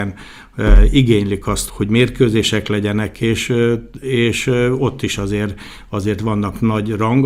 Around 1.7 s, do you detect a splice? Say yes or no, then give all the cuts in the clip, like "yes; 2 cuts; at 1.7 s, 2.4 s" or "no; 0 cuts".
yes; 1 cut; at 1.7 s